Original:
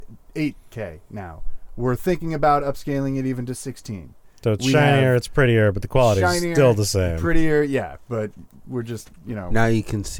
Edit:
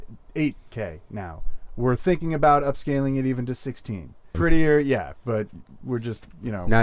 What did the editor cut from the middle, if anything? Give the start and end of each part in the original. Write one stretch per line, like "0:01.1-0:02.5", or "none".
0:04.3-0:07.2